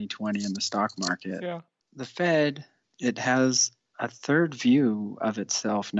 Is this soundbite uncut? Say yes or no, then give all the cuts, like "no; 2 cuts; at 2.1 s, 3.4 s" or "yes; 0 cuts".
yes; 0 cuts